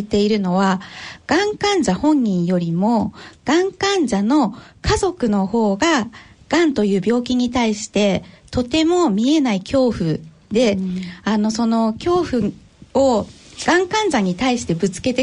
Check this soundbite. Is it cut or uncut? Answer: uncut